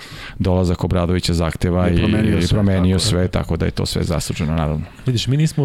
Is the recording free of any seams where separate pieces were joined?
yes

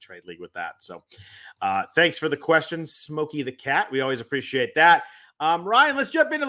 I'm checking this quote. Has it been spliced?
no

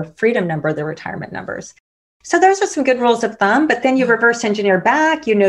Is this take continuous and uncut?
yes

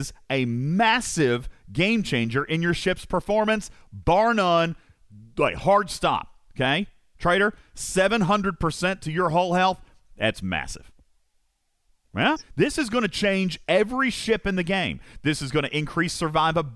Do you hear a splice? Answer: yes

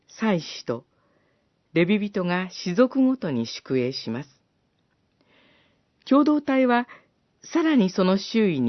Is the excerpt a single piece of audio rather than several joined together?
yes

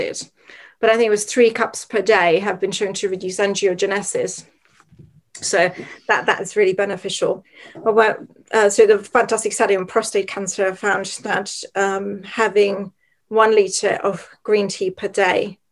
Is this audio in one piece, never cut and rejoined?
yes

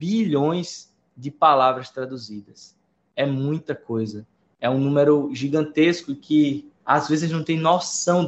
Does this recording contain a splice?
no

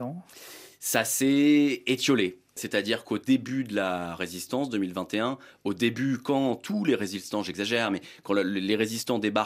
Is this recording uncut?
yes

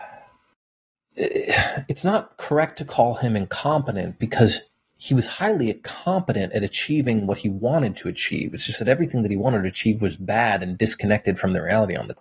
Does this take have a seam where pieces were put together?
no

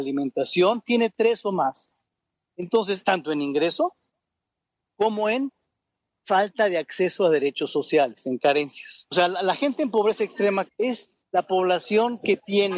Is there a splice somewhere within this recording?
yes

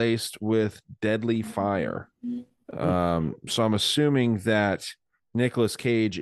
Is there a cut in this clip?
no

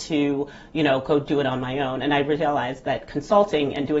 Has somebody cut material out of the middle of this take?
no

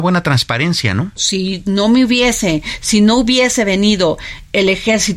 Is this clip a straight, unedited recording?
no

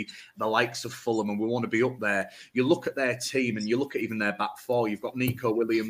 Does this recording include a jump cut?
no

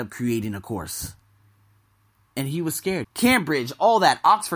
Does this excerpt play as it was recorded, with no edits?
no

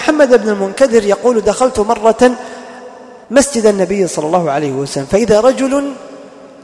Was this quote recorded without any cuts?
no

